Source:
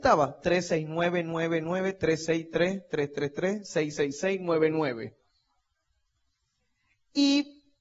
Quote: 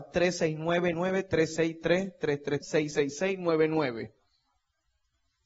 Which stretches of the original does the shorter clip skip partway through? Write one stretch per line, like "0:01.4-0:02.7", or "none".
0:01.2-0:01.6
0:03.3-0:03.6